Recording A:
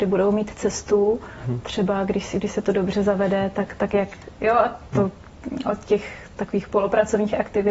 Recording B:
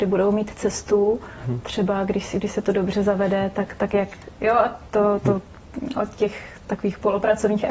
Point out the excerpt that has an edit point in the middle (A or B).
A